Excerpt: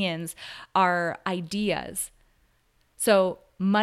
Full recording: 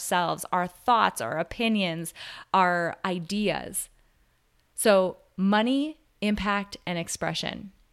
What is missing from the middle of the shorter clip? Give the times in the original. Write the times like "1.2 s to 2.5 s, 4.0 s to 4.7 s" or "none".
none